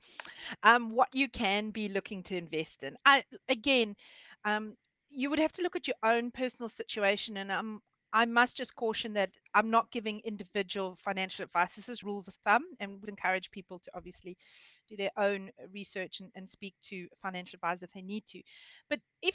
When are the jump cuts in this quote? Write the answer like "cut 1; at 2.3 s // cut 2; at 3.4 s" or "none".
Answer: cut 1; at 12.0 s // cut 2; at 13.1 s